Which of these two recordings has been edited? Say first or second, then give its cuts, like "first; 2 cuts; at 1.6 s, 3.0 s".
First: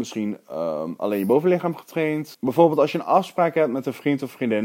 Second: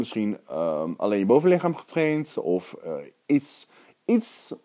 first; 1 cut; at 2.3 s